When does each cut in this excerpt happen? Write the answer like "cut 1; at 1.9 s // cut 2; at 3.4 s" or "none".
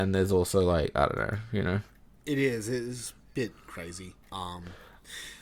cut 1; at 4.2 s